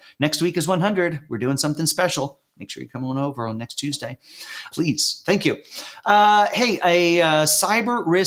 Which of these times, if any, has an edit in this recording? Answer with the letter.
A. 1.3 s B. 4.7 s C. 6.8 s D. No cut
B